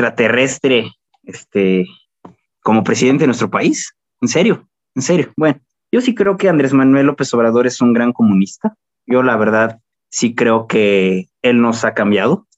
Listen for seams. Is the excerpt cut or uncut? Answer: uncut